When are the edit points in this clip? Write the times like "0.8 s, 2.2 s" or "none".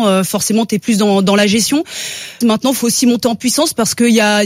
2.4 s